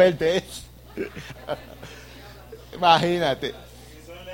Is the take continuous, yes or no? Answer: no